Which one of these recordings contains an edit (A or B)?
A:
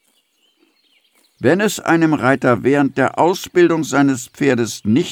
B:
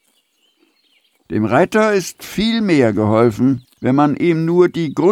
B